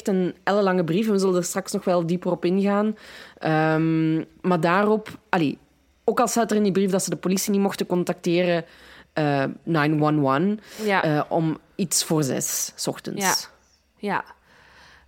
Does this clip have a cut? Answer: yes; 1 cut; at 9.6 s

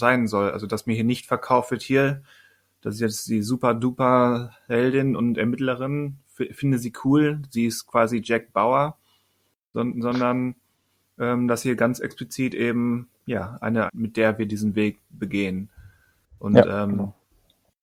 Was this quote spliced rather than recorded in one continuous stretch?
yes; 2 cuts; at 9.7 s, 13.9 s

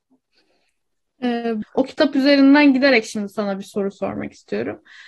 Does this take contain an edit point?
yes; 1 cut; at 1.6 s

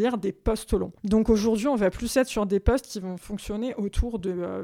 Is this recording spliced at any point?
yes; 1 cut; at 1.0 s

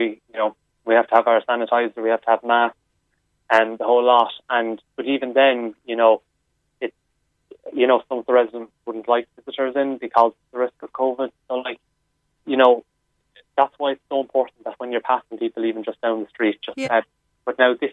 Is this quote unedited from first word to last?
no; 1 cut; at 16.8 s

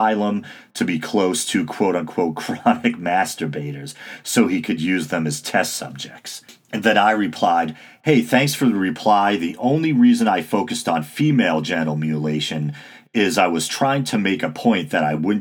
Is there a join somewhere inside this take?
no; 0 cuts

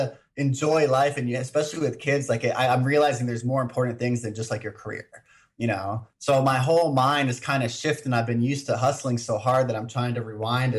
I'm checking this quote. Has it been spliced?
no; 0 cuts

